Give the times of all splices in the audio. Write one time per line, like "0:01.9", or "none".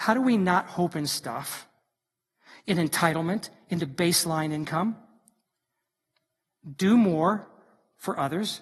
none